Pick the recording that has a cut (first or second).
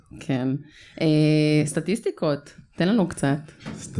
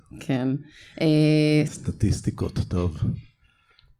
second